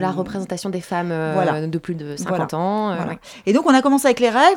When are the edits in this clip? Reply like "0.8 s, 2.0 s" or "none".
none